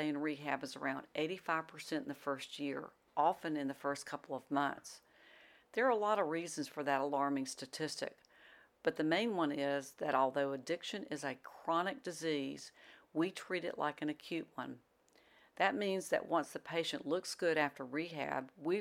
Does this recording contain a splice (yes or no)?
no